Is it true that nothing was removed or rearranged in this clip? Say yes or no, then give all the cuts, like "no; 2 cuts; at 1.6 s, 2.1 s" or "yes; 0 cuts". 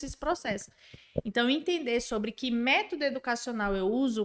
yes; 0 cuts